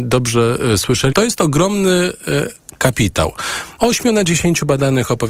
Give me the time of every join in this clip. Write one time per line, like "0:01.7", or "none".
0:01.1
0:03.8